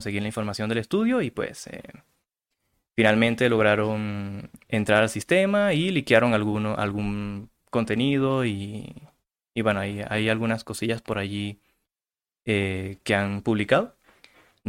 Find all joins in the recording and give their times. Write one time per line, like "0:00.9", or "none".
none